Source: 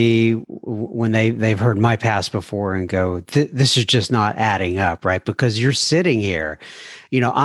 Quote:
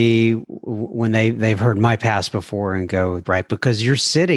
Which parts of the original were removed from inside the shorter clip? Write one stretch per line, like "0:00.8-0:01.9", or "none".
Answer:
0:03.2-0:05.0